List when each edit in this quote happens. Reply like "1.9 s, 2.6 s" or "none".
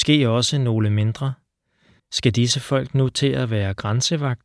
2.0 s